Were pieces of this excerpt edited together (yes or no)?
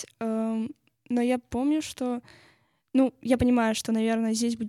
no